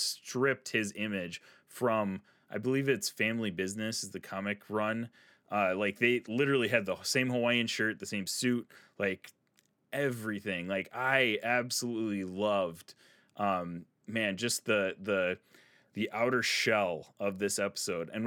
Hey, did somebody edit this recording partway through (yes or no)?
no